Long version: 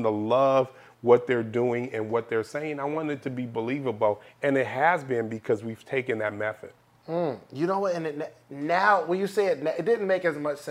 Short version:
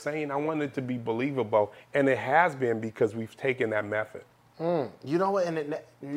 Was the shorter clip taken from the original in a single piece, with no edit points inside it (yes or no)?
yes